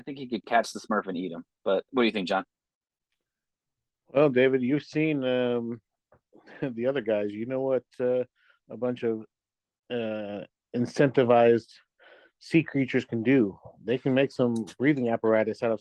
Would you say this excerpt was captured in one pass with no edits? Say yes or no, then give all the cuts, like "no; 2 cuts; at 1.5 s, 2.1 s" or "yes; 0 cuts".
yes; 0 cuts